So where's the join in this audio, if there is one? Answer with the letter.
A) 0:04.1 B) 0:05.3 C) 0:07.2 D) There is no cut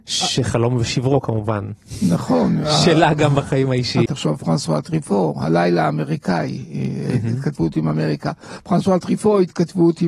A